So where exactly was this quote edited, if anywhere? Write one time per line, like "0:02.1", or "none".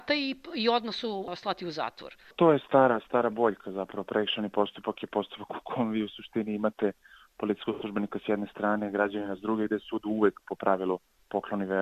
none